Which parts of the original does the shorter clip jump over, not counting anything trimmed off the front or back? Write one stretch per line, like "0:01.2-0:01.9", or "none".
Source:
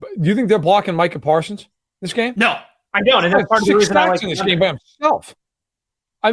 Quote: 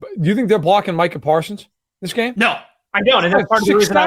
none